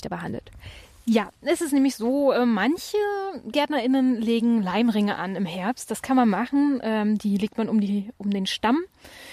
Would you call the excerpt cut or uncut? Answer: uncut